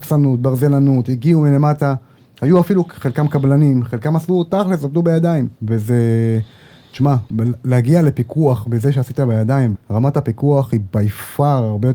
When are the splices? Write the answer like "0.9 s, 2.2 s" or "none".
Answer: 5.6 s, 9.7 s